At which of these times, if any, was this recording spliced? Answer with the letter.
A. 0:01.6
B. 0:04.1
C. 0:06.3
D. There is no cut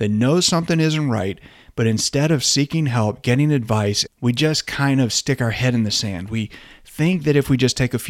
B